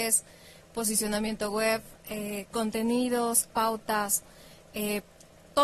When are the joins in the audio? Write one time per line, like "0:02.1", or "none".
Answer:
0:03.4